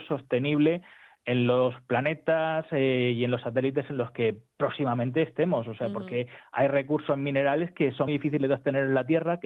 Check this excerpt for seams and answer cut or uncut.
cut